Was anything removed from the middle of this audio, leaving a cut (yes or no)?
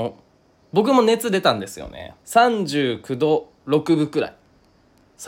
yes